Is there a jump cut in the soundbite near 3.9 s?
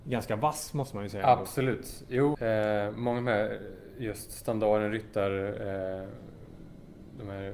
no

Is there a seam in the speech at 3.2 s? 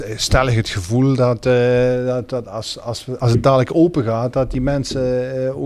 yes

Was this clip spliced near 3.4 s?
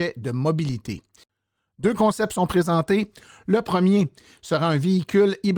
no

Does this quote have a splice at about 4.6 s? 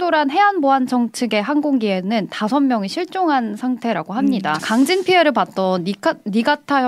yes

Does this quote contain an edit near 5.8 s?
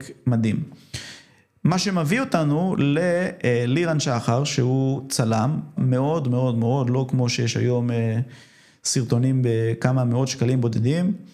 yes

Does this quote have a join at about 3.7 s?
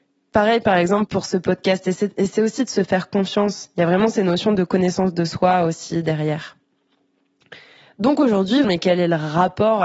no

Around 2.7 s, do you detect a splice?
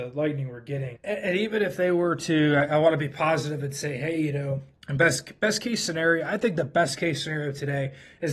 no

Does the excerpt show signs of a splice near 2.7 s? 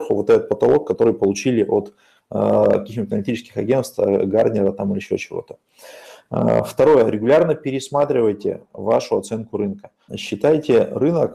no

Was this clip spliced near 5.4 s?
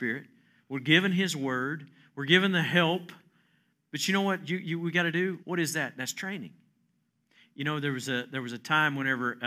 yes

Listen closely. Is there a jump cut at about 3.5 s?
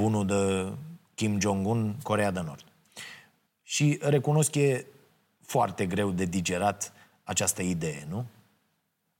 yes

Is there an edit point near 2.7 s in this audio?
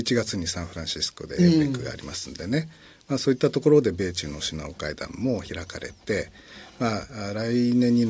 no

